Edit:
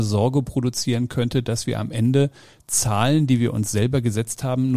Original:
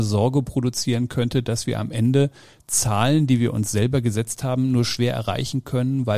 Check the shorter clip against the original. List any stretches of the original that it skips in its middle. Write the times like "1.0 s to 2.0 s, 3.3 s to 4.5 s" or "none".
none